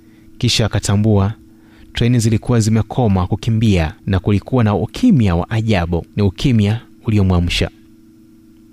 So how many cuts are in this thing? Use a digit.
2